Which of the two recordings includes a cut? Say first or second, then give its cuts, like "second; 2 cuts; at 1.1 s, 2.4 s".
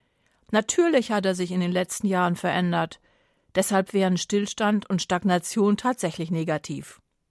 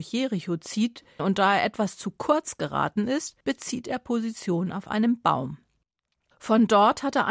second; 2 cuts; at 1.2 s, 3.4 s